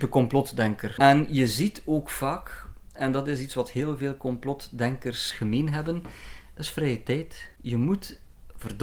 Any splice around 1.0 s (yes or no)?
yes